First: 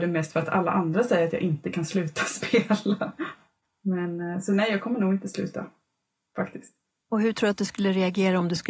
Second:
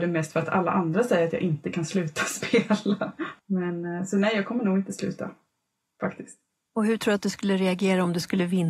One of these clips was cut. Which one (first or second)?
second